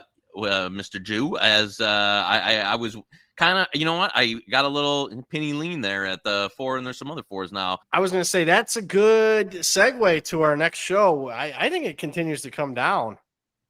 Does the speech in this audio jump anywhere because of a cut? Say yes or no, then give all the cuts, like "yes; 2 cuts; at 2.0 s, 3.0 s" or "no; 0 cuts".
yes; 1 cut; at 7.8 s